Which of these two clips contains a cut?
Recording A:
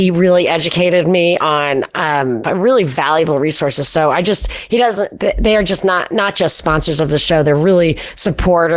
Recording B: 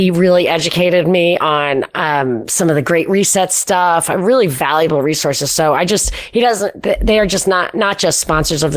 A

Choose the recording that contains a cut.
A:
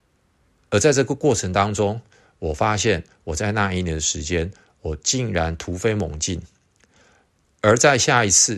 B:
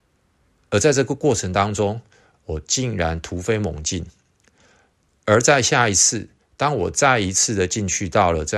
B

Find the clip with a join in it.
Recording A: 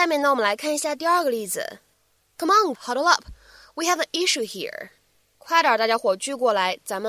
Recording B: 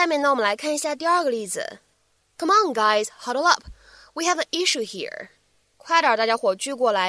A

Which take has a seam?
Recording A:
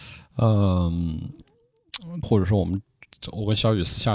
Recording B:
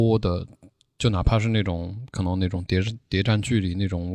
A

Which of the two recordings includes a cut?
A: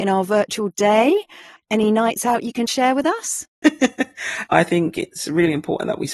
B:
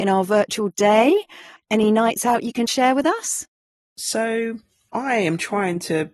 A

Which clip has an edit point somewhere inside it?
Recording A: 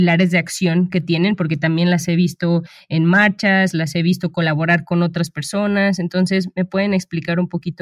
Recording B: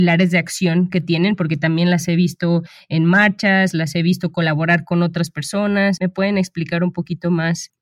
B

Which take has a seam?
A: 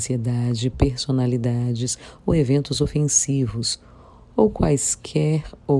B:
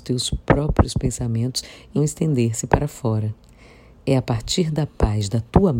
B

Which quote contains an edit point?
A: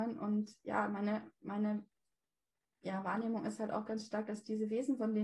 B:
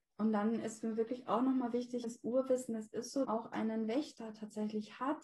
B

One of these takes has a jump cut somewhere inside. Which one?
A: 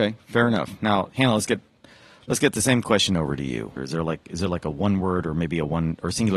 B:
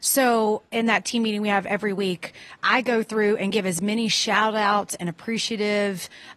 A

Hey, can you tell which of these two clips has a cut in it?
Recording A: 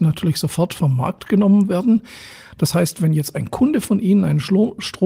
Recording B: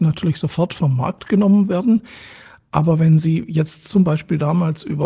A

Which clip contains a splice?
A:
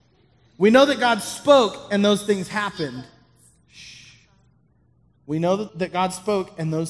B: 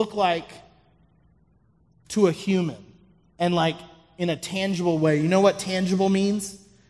A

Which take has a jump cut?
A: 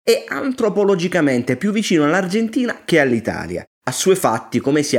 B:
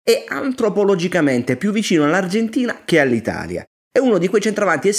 A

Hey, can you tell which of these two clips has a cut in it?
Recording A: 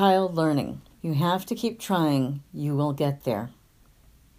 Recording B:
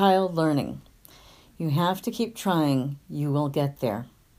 A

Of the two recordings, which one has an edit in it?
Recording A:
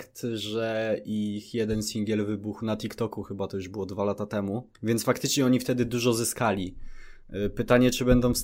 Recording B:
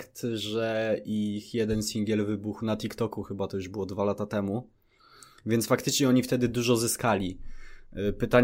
A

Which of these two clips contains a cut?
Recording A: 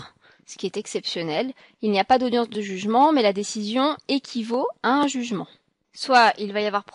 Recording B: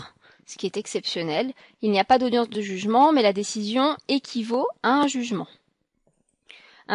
A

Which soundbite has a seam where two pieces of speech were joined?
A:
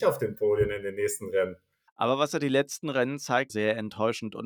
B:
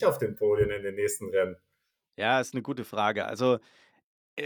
A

